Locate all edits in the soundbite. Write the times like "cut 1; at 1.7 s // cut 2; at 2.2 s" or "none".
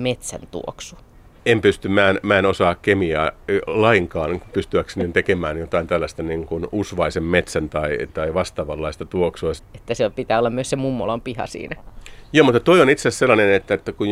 cut 1; at 1.4 s // cut 2; at 9.6 s